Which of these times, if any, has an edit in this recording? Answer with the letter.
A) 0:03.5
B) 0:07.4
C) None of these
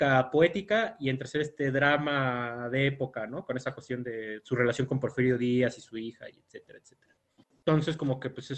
B